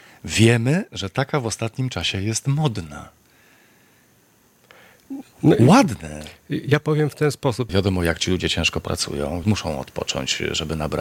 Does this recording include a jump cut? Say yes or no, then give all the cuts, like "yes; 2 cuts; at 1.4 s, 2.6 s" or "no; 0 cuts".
yes; 2 cuts; at 7.7 s, 9.4 s